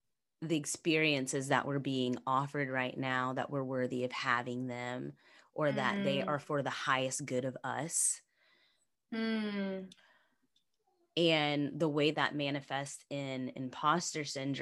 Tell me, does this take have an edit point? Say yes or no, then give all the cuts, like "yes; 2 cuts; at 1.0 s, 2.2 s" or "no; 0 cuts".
yes; 2 cuts; at 9.0 s, 12.1 s